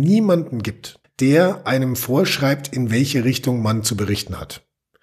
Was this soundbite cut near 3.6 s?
no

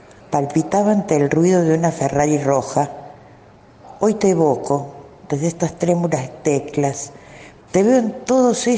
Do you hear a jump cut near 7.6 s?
yes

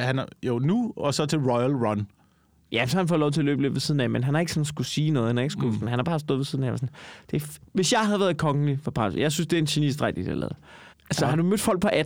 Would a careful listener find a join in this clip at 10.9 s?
yes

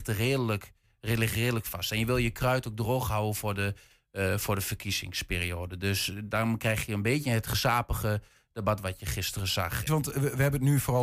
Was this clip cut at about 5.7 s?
no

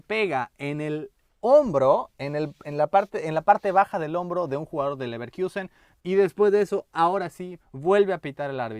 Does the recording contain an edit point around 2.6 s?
no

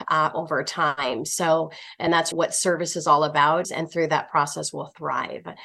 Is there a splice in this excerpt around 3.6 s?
yes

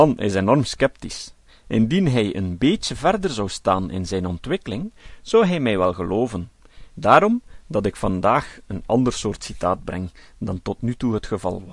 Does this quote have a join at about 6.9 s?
yes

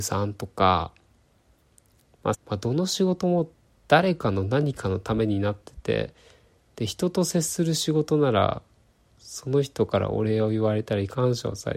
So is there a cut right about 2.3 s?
yes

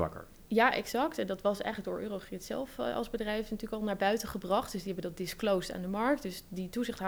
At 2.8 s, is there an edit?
no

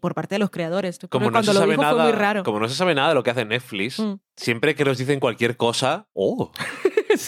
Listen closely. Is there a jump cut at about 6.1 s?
yes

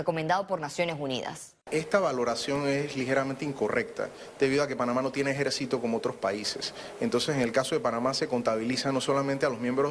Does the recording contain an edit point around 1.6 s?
yes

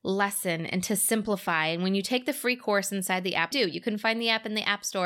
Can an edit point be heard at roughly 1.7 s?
no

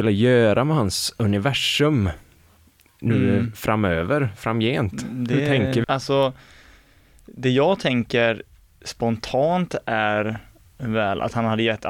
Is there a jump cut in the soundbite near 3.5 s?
no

